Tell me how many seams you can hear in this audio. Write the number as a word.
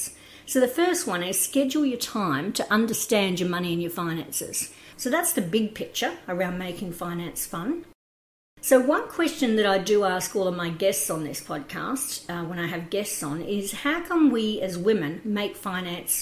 one